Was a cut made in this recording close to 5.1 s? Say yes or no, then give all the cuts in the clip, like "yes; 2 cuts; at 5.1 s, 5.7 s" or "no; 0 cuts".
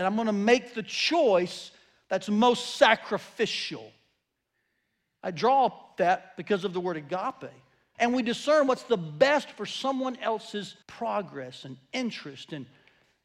no; 2 cuts; at 7.9 s, 10.8 s